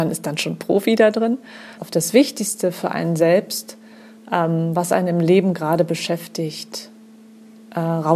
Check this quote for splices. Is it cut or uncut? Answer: cut